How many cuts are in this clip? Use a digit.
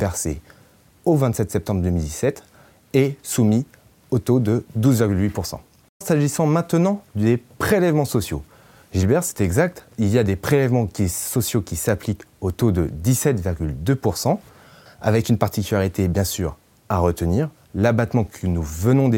1